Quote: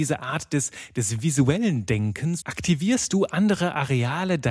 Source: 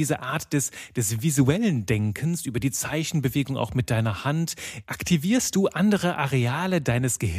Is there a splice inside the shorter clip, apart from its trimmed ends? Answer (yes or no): yes